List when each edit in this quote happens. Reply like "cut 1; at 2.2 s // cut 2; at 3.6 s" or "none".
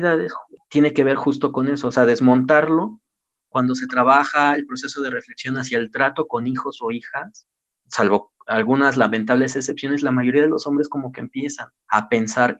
none